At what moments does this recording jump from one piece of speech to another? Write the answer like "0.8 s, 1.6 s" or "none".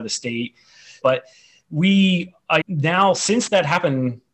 1.0 s, 2.6 s